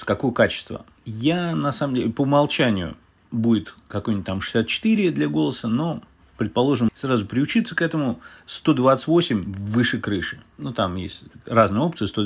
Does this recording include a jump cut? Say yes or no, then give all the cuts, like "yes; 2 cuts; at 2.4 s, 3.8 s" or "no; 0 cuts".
yes; 1 cut; at 6.9 s